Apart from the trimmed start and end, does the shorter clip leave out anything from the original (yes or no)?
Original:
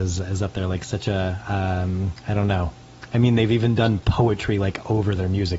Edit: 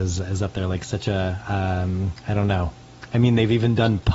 no